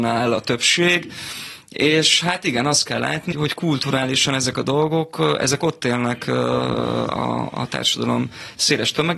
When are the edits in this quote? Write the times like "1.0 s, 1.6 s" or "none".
3.3 s